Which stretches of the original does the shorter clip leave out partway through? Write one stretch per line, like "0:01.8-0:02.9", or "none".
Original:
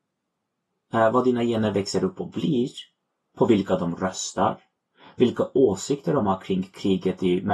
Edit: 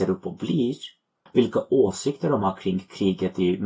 0:03.2-0:05.1